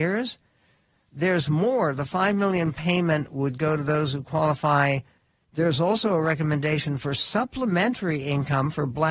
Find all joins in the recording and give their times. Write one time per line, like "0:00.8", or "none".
0:05.4